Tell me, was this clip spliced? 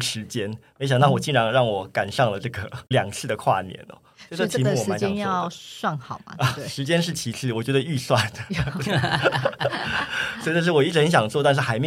no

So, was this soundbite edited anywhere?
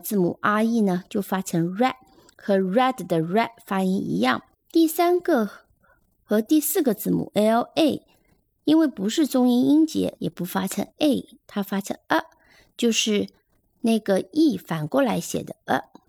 yes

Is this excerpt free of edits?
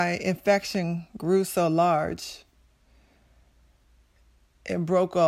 yes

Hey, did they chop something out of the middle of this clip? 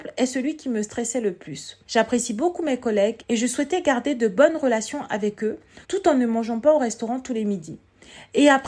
yes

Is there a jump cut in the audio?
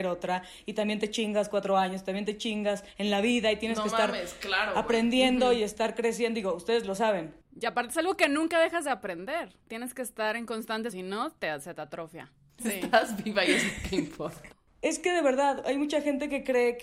yes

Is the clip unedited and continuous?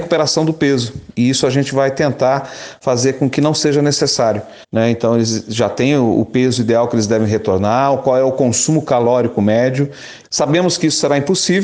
no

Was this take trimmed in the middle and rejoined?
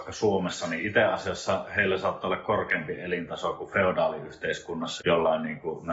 yes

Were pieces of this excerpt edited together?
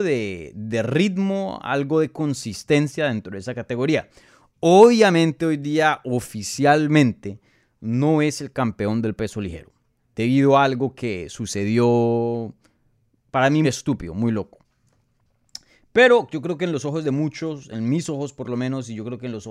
yes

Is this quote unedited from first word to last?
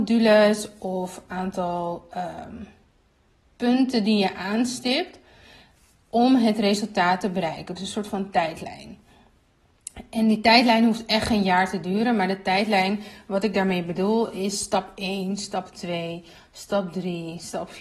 yes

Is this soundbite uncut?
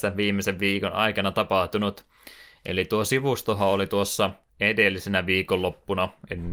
yes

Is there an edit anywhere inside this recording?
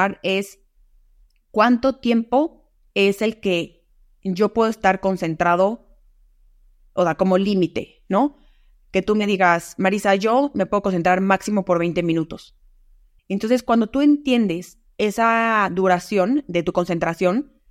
yes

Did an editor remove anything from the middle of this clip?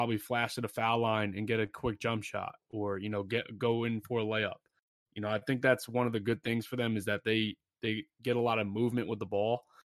no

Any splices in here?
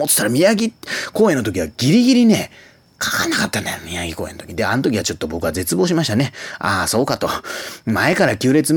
no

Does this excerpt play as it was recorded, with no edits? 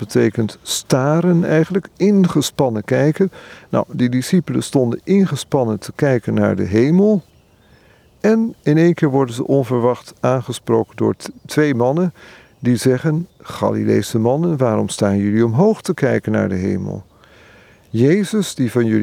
yes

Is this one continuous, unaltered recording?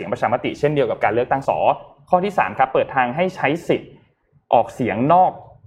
no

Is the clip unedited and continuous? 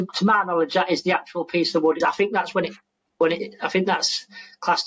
no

